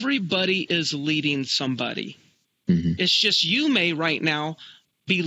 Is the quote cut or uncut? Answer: uncut